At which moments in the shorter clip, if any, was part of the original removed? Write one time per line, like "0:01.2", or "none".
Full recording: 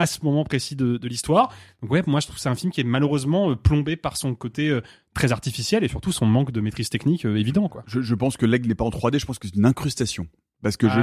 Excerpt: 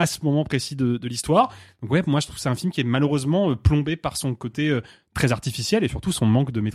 none